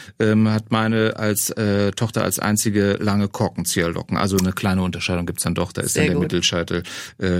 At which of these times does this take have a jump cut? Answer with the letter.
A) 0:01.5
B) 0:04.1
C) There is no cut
C